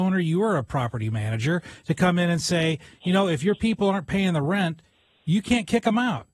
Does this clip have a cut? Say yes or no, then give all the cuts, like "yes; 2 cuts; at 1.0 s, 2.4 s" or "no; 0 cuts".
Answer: no; 0 cuts